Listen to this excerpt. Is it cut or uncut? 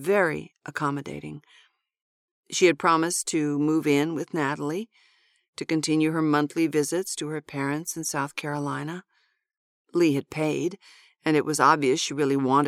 cut